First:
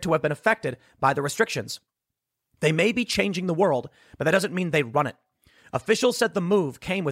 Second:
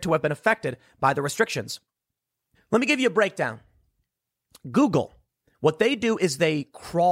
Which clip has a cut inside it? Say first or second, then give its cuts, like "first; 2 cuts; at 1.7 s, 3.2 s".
second; 1 cut; at 2.5 s